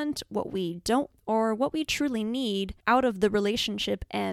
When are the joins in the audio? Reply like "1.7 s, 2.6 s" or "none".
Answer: 1.1 s, 2.8 s